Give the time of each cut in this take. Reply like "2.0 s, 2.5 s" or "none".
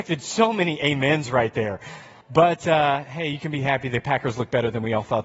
2.2 s